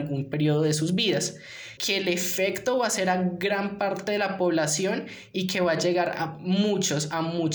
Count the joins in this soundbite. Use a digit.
1